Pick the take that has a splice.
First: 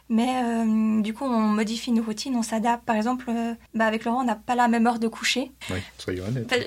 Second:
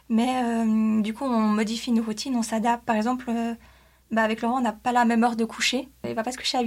first; 2 cuts; at 3.7 s, 5.6 s

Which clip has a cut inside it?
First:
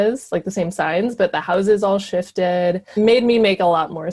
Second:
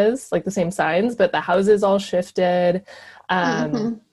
first; 1 cut; at 3.0 s

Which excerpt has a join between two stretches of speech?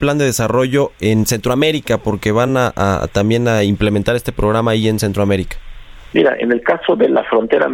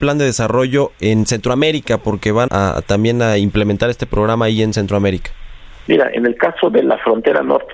second; 1 cut; at 2.5 s

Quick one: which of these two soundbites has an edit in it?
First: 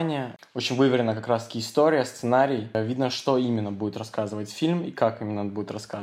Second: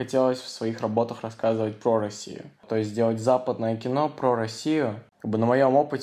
first; 1 cut; at 3.1 s

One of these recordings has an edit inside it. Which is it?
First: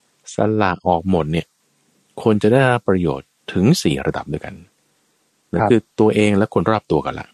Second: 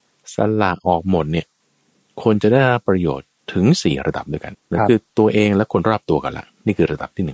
second; 1 cut; at 4.5 s

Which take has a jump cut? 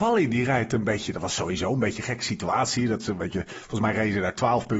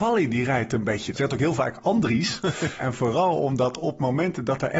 second; 2 cuts; at 1.1 s, 2.8 s

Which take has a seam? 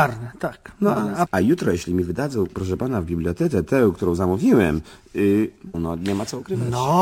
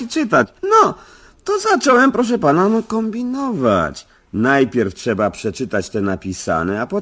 first; 2 cuts; at 1.3 s, 5.7 s

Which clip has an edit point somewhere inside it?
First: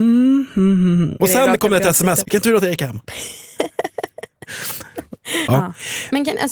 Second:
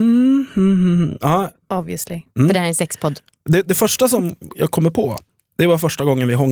first; 3 cuts; at 1.2 s, 2.2 s, 5.5 s

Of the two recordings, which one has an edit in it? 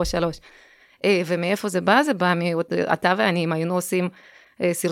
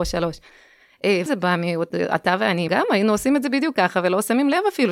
second; 2 cuts; at 1.3 s, 2.7 s

